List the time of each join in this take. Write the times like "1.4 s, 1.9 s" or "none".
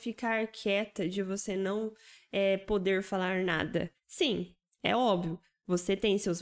3.9 s